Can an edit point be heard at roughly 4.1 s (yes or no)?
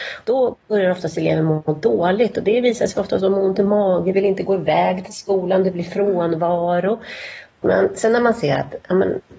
yes